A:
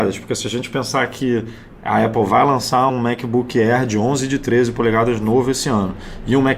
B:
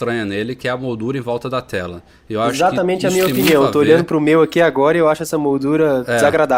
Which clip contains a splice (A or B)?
A